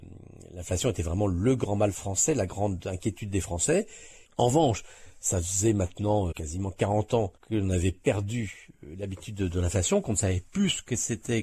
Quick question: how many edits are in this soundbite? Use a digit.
3